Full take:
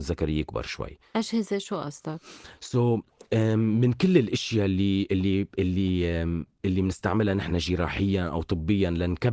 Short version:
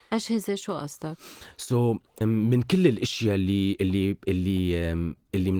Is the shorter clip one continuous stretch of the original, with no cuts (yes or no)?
no